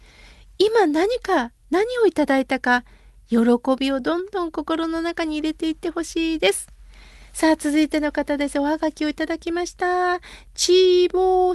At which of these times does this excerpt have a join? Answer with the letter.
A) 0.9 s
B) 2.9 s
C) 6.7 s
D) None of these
D